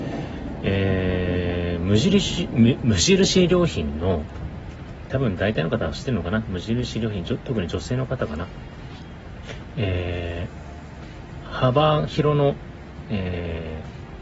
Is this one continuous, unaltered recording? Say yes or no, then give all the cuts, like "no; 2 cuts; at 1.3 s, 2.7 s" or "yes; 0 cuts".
no; 1 cut; at 5.1 s